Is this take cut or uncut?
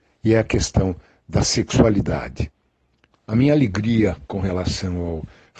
cut